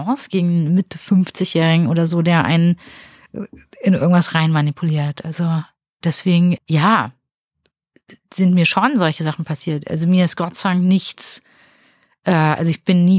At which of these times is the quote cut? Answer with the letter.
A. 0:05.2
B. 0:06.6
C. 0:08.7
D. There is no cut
B